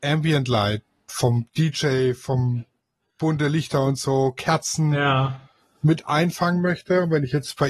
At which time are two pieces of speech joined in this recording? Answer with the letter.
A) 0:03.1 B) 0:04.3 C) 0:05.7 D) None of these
D